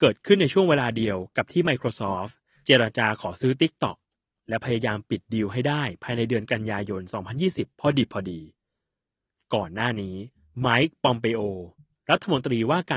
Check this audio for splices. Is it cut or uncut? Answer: uncut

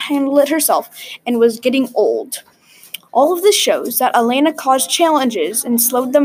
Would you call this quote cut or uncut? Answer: uncut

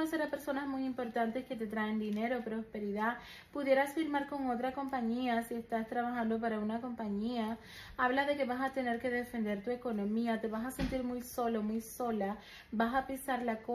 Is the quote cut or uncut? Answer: uncut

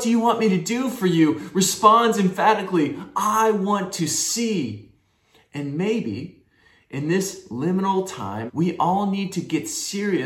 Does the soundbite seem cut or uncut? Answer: cut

